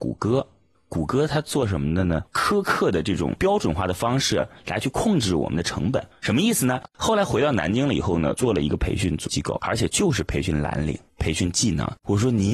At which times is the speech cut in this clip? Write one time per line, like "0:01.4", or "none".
0:02.3
0:06.8